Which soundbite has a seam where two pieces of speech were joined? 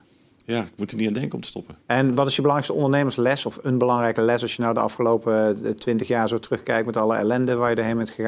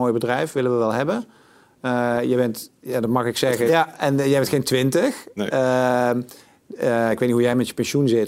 second; 1 cut; at 3.7 s

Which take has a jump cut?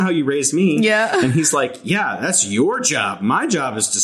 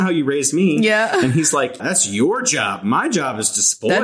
second; 1 cut; at 1.8 s

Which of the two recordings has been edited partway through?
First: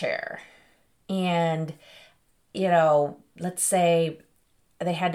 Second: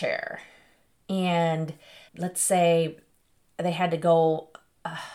second; 1 cut; at 2.1 s

